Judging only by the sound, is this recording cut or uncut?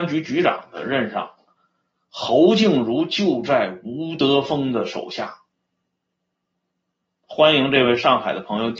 uncut